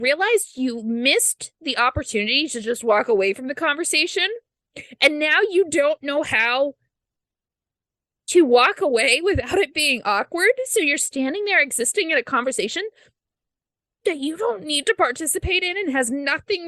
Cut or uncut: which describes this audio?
uncut